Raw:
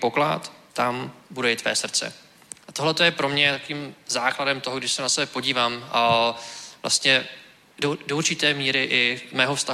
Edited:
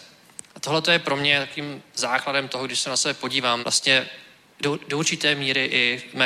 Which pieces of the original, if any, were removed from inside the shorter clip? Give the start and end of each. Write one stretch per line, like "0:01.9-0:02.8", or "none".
0:05.7-0:06.8